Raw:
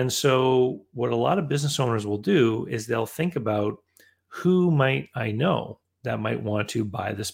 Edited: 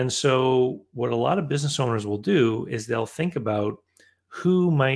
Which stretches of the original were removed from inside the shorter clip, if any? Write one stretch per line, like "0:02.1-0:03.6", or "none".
none